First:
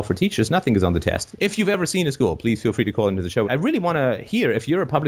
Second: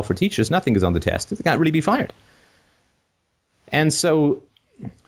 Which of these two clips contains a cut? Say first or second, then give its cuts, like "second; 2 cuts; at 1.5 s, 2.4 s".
first; 2 cuts; at 1.3 s, 3.4 s